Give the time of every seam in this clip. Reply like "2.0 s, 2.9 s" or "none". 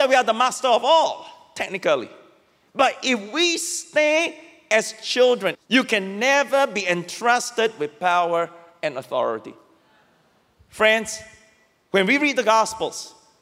5.5 s